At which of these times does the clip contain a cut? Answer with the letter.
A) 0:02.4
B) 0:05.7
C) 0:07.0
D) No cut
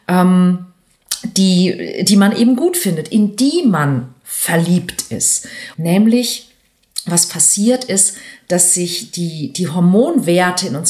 B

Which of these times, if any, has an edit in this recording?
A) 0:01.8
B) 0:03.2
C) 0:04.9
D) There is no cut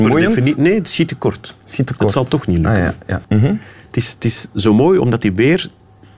B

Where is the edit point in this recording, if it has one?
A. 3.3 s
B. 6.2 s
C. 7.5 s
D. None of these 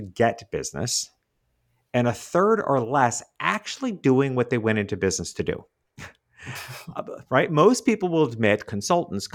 D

